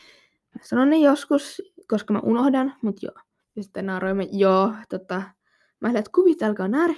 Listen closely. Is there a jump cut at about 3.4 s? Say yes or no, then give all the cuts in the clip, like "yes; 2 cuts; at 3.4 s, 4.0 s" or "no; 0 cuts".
yes; 1 cut; at 3.4 s